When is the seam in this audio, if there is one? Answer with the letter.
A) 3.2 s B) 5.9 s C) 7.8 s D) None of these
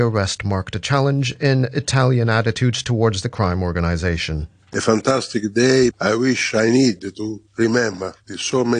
B